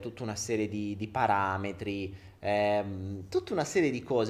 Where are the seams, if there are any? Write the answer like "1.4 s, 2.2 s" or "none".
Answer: none